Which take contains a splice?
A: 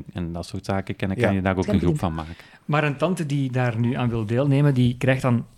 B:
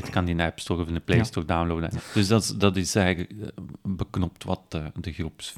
B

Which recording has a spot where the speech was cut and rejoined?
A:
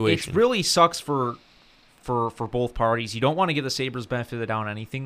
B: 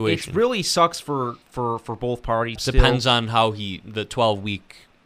B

